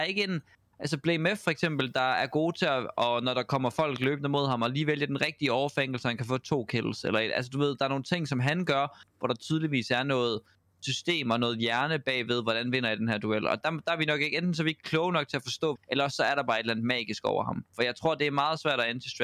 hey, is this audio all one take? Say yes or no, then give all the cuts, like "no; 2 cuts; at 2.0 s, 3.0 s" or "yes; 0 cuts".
no; 2 cuts; at 13.6 s, 15.8 s